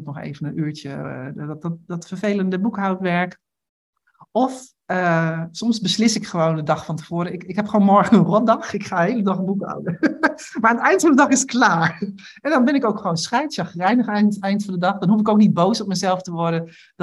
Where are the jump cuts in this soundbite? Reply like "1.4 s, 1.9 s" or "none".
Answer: none